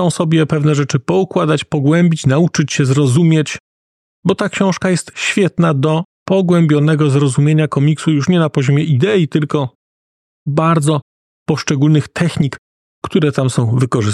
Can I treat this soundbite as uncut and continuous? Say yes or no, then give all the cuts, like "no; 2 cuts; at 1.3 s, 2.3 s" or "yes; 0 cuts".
no; 1 cut; at 5.1 s